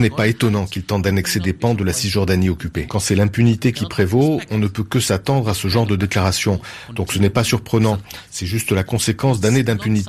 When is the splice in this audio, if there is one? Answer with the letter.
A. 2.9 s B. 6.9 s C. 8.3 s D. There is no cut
A